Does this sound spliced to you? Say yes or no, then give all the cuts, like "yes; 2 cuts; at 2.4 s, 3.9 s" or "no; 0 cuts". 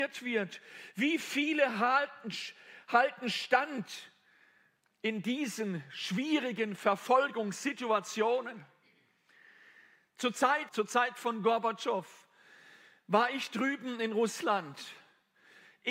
yes; 1 cut; at 10.7 s